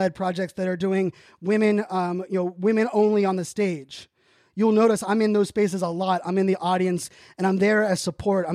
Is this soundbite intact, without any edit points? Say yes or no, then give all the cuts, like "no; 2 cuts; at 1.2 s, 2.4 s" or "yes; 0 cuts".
yes; 0 cuts